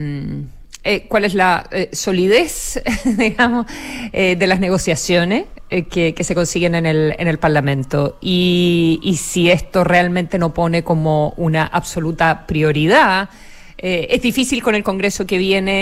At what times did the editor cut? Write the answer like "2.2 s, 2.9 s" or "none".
none